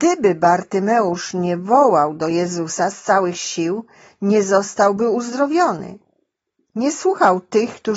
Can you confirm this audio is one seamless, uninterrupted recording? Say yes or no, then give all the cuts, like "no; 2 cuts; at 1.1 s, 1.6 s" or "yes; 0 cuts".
yes; 0 cuts